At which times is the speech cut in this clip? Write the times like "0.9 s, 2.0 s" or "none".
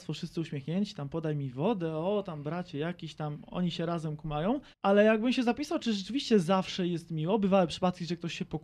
4.7 s